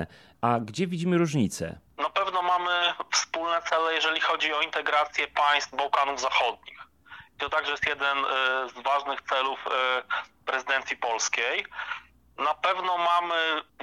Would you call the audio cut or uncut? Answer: uncut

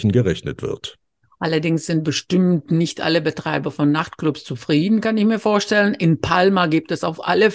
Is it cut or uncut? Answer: uncut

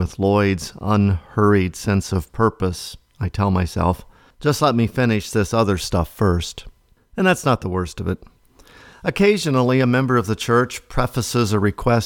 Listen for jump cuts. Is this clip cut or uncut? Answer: uncut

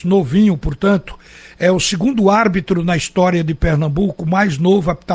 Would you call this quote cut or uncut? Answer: uncut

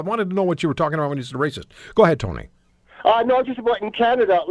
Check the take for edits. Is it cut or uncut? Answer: uncut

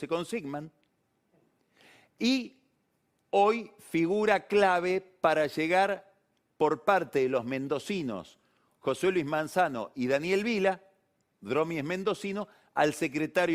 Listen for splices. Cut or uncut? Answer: uncut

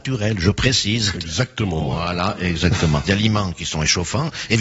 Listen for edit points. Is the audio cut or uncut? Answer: cut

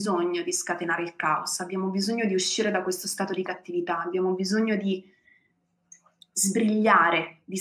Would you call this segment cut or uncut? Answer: uncut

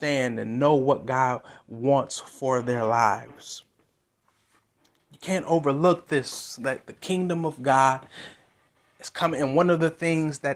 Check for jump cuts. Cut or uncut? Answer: uncut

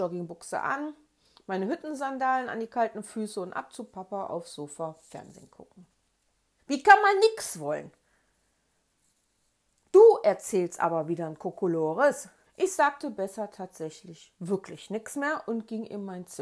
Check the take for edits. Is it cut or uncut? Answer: cut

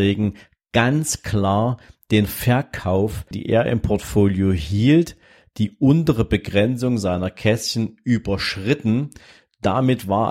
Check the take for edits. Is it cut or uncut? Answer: cut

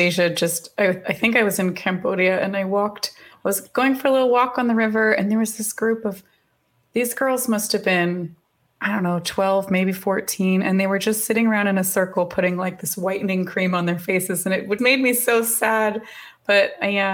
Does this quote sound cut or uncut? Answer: cut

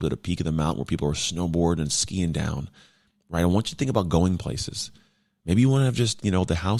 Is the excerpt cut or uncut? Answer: uncut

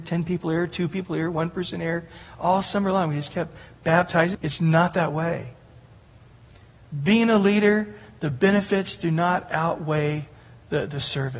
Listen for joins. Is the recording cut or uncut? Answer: cut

